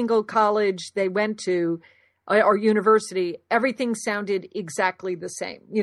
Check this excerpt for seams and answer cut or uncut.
uncut